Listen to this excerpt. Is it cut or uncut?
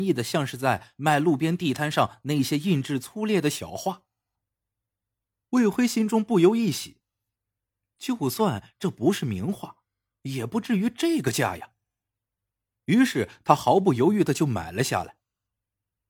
uncut